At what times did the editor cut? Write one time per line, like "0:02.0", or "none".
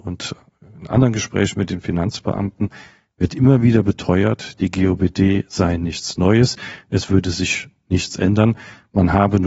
none